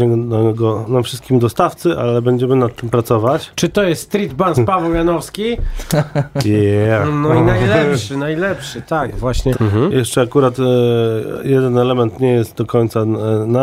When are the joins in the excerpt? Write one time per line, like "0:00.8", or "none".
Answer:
0:09.5